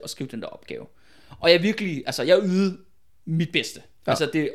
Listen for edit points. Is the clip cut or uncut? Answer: uncut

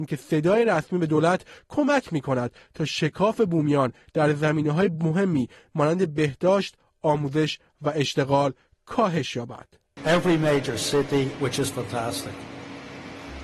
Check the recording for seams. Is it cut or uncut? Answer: cut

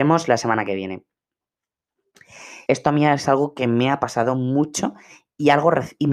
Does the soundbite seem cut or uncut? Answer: cut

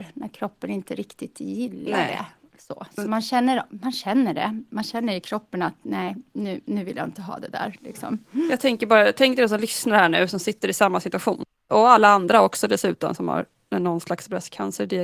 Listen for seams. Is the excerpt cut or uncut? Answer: uncut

